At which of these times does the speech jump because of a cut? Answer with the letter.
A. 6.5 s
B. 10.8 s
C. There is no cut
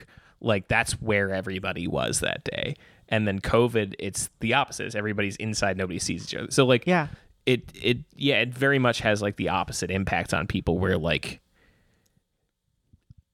C